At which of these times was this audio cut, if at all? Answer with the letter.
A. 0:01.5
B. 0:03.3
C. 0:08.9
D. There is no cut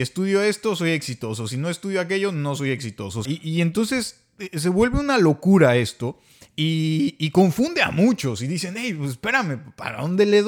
B